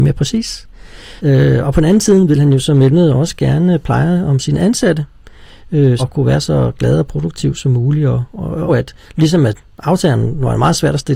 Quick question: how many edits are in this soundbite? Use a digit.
3